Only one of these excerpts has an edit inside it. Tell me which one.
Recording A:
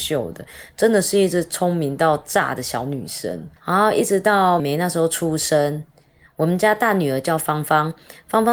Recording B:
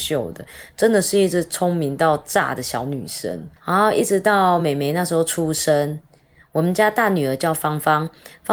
A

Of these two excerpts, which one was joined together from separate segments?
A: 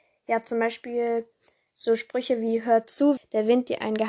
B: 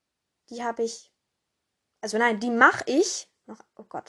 A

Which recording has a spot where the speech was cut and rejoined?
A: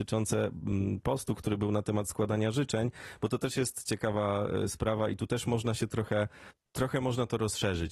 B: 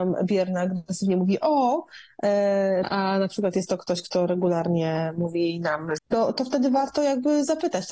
B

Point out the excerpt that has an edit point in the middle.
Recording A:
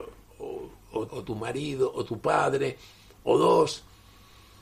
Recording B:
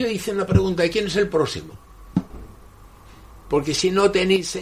A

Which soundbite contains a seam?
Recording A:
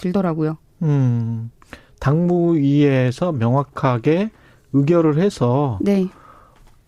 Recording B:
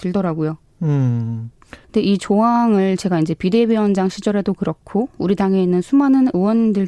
B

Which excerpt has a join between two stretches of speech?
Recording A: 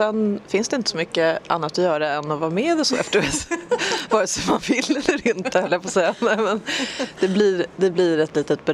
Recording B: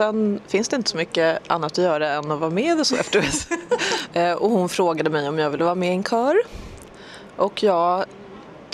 B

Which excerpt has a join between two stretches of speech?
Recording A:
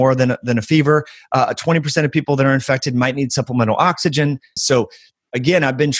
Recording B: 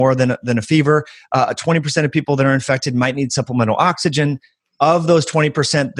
A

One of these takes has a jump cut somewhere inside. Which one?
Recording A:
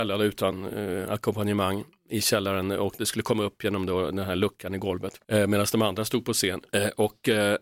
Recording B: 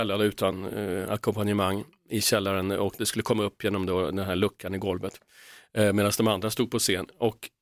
A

